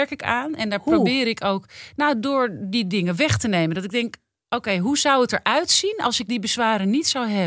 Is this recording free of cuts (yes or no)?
yes